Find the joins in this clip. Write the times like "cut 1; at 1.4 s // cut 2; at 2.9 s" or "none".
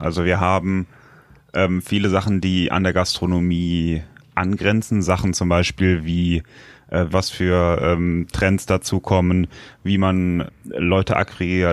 cut 1; at 7.1 s // cut 2; at 10.5 s